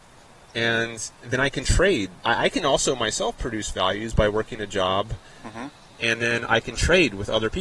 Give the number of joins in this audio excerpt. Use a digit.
1